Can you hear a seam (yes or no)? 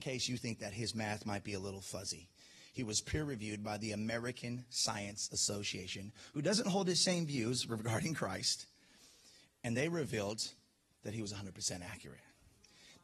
no